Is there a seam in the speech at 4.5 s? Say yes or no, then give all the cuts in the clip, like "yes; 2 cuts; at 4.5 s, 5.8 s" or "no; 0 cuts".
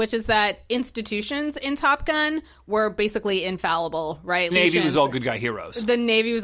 yes; 1 cut; at 4.5 s